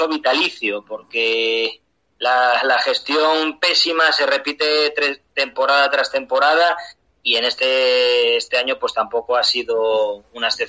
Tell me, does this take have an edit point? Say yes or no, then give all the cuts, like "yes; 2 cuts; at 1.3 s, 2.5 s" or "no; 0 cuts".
no; 0 cuts